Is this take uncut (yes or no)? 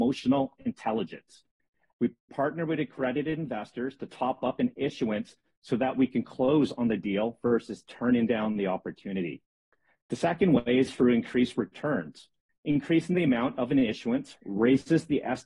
no